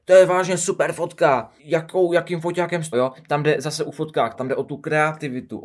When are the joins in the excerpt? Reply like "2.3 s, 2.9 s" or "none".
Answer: 1.6 s, 2.9 s, 4.3 s